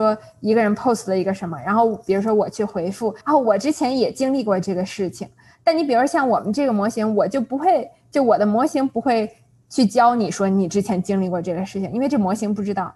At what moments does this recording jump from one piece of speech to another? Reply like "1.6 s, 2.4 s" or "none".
3.2 s

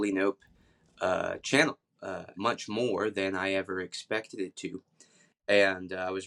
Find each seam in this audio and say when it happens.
2.3 s

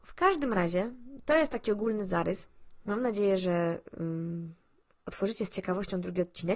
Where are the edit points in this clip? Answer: none

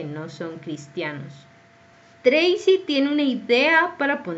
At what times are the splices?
2.1 s

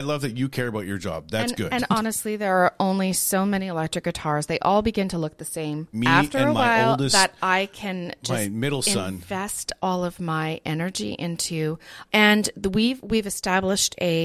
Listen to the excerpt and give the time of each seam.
5.9 s, 12.1 s

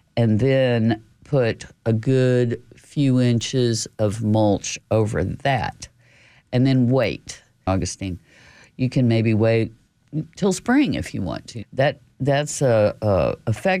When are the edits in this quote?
7.7 s, 11.6 s

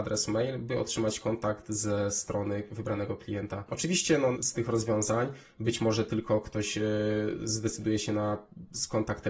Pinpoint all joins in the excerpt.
4.3 s

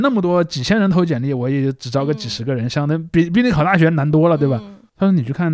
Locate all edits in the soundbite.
none

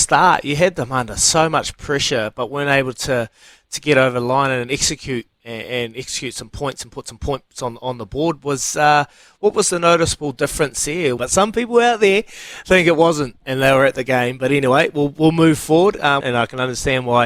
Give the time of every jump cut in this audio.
11.2 s, 16.2 s

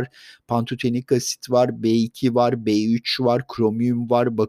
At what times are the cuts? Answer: none

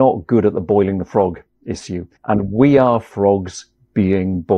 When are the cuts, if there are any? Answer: 2.2 s

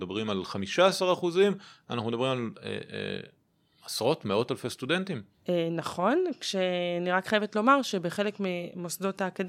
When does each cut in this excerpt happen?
none

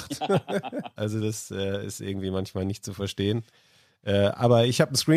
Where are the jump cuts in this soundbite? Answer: 1.0 s

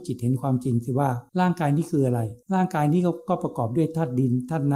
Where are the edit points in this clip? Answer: 1.3 s, 2.4 s

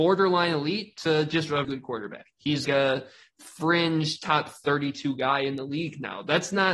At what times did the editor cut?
1.6 s, 2.6 s

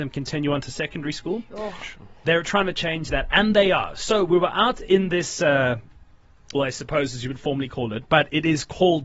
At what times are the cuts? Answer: 6.5 s

